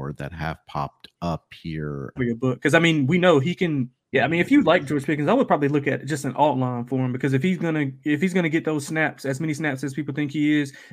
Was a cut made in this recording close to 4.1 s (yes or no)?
yes